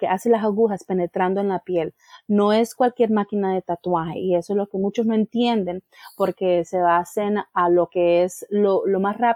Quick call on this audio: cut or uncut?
uncut